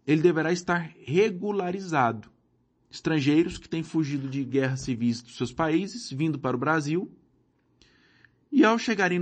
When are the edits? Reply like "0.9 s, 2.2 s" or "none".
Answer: 2.8 s